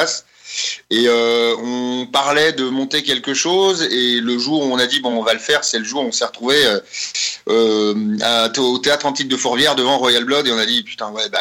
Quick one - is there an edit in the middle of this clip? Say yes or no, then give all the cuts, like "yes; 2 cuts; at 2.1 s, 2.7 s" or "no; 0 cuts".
no; 0 cuts